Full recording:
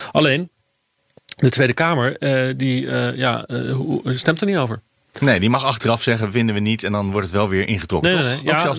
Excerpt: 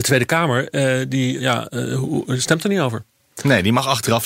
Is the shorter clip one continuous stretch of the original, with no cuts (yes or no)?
no